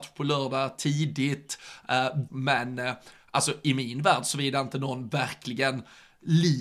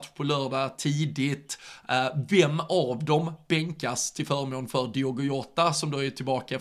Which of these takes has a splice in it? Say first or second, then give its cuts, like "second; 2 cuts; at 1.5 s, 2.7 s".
first; 1 cut; at 2.3 s